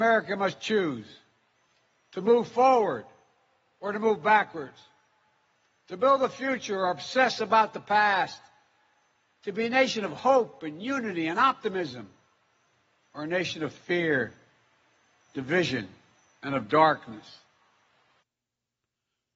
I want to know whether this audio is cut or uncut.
uncut